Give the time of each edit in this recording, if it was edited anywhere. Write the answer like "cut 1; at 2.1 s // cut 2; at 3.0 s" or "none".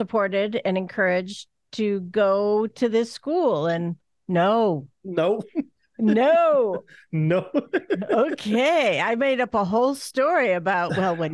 none